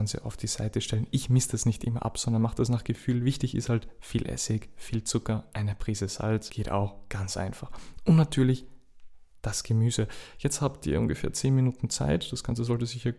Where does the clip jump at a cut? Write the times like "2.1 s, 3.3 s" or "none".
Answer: none